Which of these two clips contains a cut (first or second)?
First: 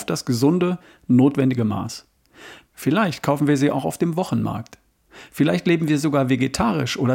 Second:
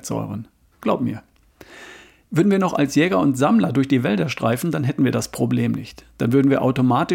first